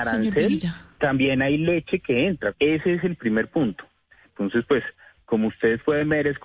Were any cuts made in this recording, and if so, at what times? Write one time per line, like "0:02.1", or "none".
0:02.5
0:04.2